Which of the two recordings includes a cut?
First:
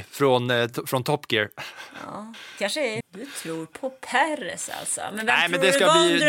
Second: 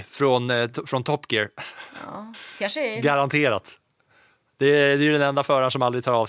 first; 1 cut; at 3.0 s

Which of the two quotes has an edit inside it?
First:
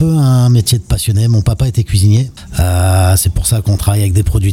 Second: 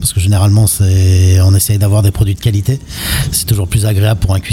first; 1 cut; at 2.5 s

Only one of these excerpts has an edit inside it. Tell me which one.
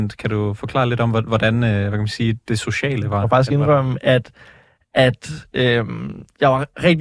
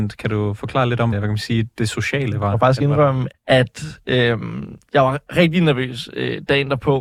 second; 2 cuts; at 1.1 s, 3.3 s

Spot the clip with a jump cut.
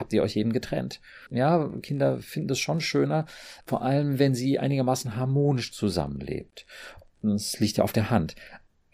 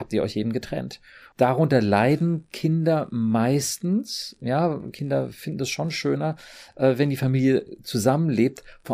first; 2 cuts; at 1.3 s, 3.6 s

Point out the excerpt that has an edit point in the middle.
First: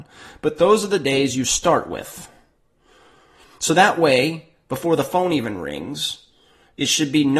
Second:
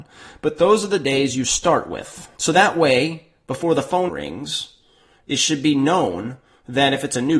second; 2 cuts; at 2.3 s, 4.1 s

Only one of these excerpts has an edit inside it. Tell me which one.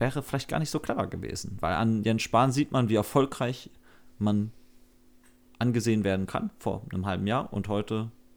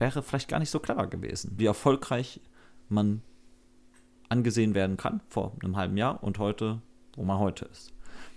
second; 1 cut; at 1.6 s

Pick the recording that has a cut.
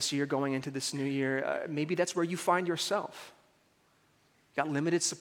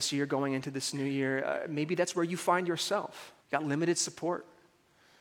second; 1 cut; at 3.4 s

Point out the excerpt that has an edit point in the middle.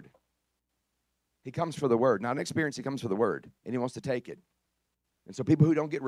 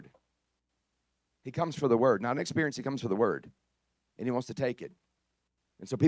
first; 1 cut; at 3.6 s

